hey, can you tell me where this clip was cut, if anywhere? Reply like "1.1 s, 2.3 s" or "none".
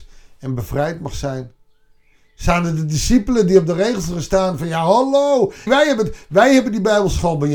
5.7 s

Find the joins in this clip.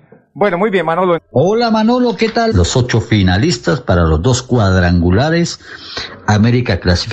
1.2 s, 2.5 s

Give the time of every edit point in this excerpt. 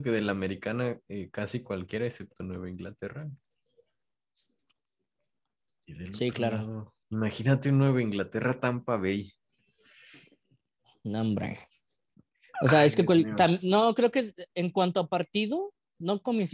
7.0 s

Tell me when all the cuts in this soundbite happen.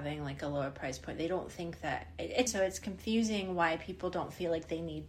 2.5 s

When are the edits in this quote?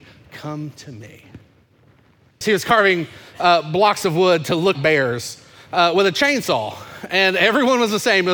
2.4 s, 4.7 s

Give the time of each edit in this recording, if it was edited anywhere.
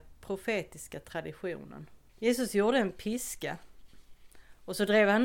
2.1 s

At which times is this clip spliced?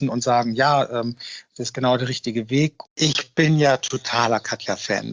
2.9 s

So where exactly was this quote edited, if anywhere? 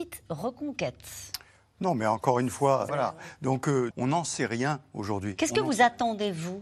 2.9 s, 3.9 s

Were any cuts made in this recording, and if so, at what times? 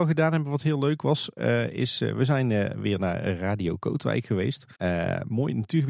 4.7 s

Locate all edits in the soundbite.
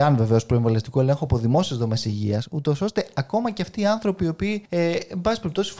4.7 s

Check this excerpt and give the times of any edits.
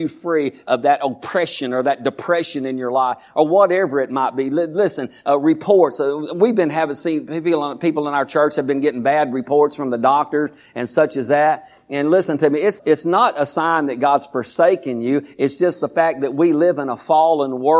12.8 s

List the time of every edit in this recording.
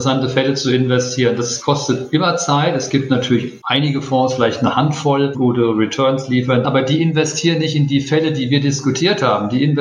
5.3 s, 6.6 s

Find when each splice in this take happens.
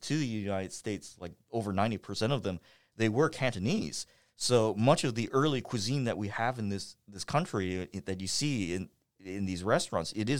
none

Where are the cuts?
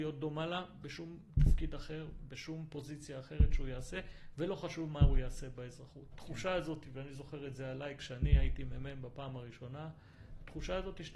6.1 s

